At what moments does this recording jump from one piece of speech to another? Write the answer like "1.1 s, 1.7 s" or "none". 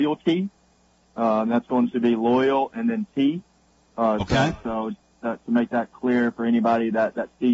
none